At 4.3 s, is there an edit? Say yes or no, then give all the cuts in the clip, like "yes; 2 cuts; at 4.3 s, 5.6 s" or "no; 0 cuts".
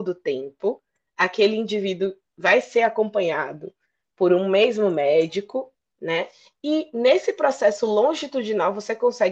no; 0 cuts